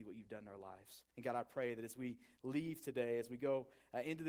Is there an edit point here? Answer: yes; 1 cut; at 1.1 s

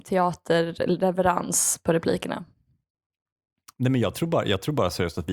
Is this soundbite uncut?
yes; 0 cuts

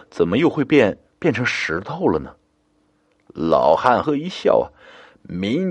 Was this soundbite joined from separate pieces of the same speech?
yes; 1 cut; at 4.0 s

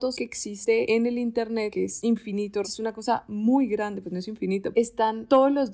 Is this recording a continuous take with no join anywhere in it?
no; 2 cuts; at 2.6 s, 4.7 s

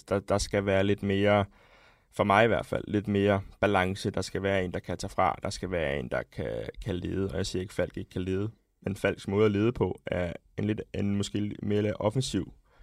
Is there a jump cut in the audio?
no; 0 cuts

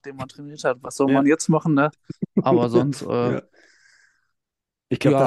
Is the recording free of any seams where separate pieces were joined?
yes; 0 cuts

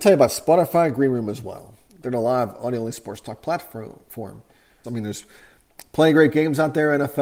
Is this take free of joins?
no; 1 cut; at 4.8 s

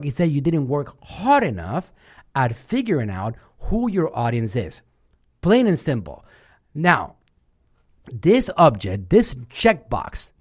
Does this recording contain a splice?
no; 0 cuts

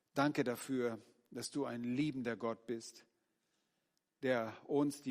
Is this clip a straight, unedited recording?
yes; 0 cuts

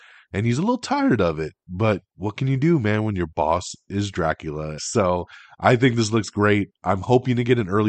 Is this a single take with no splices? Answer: no; 1 cut; at 4.8 s

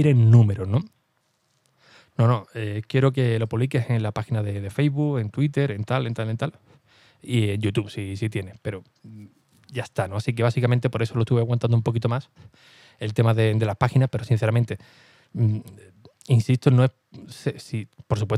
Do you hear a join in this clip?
no; 0 cuts

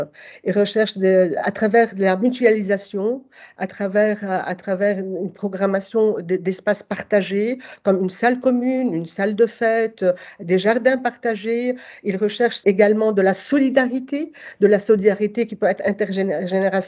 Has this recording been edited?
no; 0 cuts

